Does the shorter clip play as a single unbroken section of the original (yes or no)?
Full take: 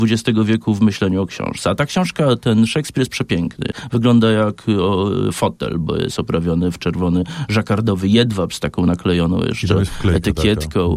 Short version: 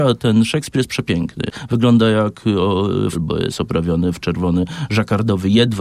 no